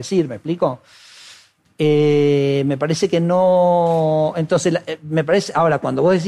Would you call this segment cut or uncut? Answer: uncut